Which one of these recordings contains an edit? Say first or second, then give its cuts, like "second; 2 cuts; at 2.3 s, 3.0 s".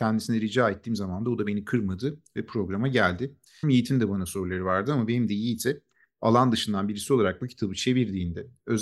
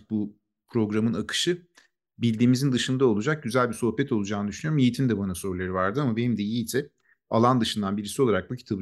first; 1 cut; at 3.6 s